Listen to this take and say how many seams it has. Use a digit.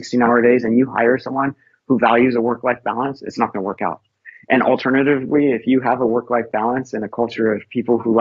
0